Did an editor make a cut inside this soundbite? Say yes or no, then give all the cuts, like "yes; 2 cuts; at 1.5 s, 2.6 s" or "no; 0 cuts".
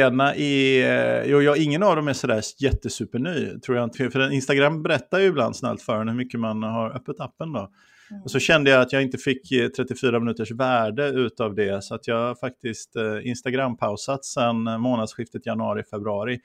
yes; 1 cut; at 3.9 s